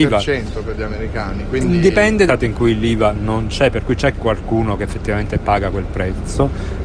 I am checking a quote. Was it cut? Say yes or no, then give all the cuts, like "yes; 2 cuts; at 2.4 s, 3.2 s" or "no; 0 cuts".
yes; 1 cut; at 2.3 s